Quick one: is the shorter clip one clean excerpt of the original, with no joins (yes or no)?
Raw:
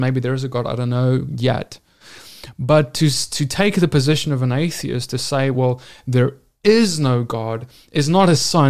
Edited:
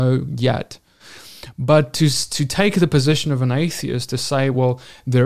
yes